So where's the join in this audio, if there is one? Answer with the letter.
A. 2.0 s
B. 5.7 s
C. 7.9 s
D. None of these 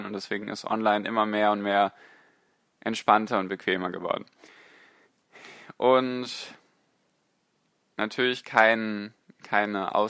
D